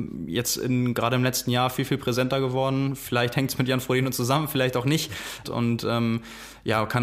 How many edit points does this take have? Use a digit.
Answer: 1